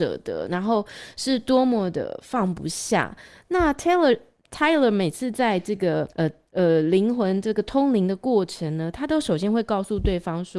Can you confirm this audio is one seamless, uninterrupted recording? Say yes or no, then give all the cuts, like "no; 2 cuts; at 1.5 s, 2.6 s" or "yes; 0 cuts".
no; 1 cut; at 6.1 s